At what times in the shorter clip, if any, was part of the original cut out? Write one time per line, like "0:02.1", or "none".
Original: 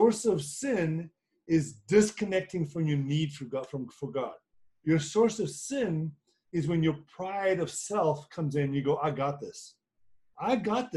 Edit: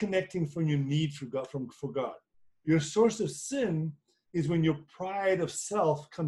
none